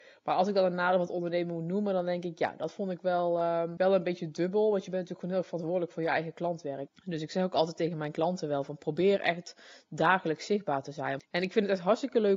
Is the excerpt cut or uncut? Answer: cut